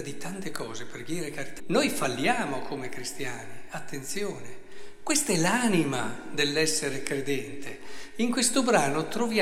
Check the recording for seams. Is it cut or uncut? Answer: cut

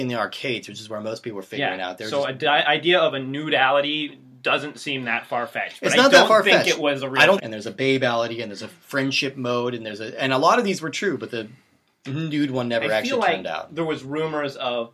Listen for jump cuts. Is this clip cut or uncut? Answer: cut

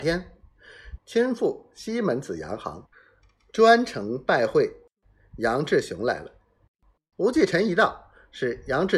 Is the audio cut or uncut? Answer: cut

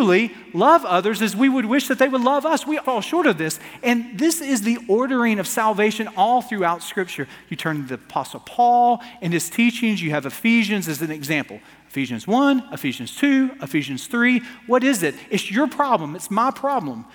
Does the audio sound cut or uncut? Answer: cut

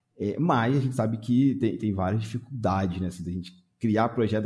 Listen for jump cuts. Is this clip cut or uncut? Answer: uncut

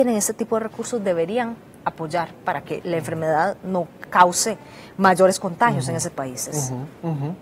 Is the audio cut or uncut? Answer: cut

